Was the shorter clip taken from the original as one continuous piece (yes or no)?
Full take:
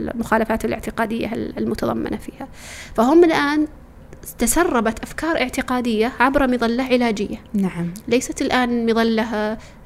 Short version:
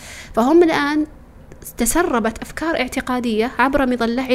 yes